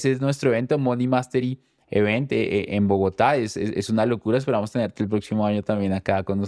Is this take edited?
no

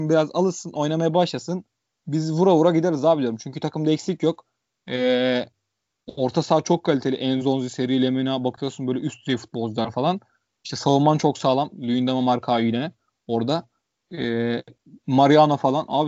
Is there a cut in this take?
no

